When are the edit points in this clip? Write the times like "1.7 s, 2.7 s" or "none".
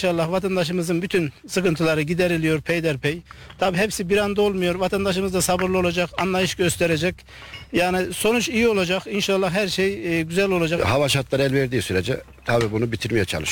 10.8 s